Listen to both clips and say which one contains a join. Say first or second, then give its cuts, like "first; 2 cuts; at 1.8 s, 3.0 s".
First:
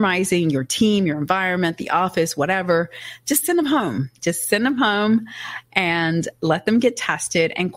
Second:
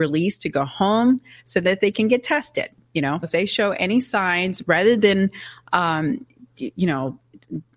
second; 1 cut; at 3.2 s